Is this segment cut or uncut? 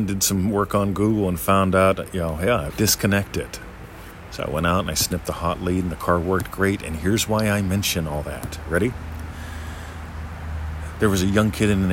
cut